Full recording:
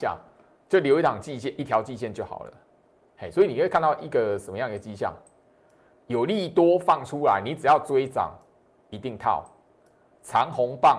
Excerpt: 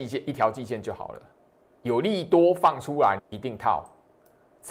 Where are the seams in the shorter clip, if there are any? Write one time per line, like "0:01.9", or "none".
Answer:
0:01.7
0:03.2